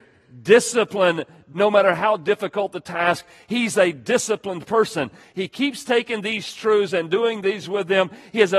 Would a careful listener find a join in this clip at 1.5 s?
yes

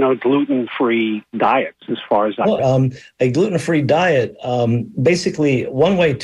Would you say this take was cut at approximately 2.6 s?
yes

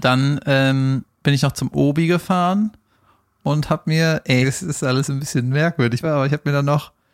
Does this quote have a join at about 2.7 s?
no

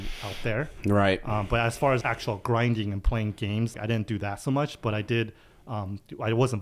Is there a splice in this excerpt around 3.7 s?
yes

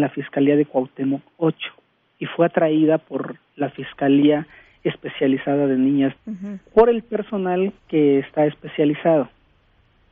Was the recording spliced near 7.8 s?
yes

